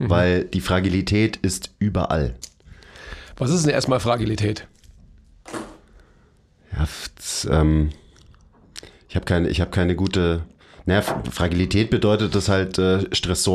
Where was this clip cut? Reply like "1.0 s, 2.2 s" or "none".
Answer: none